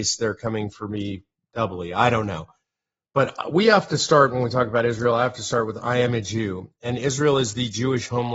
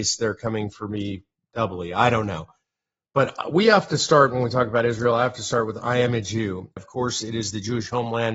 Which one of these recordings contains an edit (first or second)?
second